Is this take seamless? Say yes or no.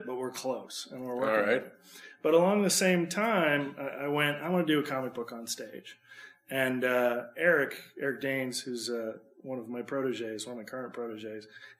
yes